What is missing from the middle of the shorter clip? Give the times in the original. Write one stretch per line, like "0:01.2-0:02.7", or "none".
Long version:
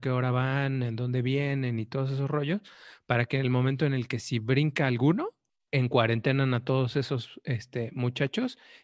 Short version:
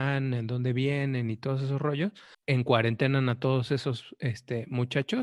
0:02.8-0:05.6